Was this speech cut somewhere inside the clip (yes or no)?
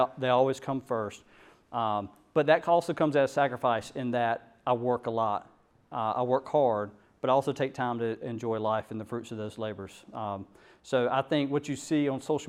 no